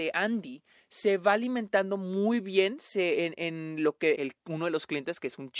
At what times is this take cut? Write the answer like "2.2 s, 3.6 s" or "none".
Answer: 4.1 s